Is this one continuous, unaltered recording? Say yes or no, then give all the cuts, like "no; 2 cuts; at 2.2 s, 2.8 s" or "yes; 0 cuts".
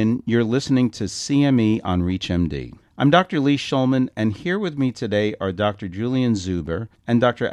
yes; 0 cuts